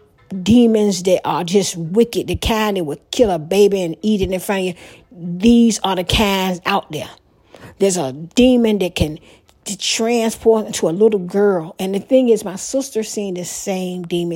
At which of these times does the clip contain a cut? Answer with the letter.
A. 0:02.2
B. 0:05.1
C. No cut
C